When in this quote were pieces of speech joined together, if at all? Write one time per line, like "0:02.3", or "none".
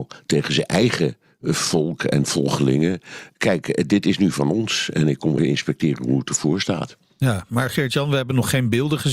0:05.4